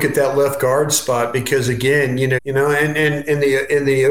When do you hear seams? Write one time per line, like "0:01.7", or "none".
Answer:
0:02.4